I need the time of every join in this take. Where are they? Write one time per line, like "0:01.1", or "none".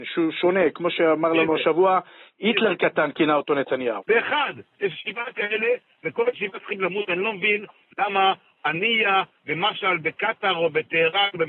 0:04.0